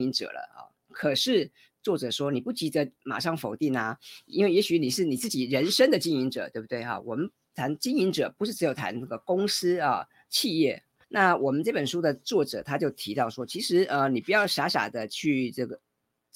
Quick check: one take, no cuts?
no; 1 cut; at 11.0 s

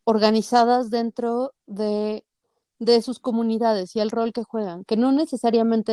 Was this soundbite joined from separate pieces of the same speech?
no; 0 cuts

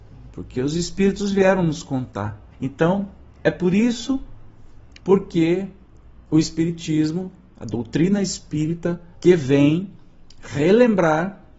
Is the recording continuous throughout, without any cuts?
no; 3 cuts; at 2.5 s, 5.0 s, 9.1 s

